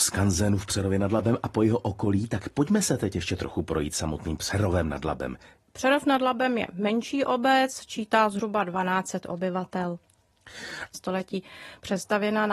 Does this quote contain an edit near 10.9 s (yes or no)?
yes